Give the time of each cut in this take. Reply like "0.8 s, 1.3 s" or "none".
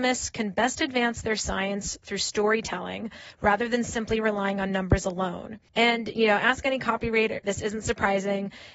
5.7 s, 7.4 s